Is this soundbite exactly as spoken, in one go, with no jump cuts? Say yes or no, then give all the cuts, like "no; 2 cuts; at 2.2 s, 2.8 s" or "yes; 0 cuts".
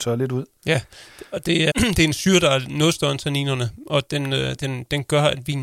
no; 1 cut; at 1.7 s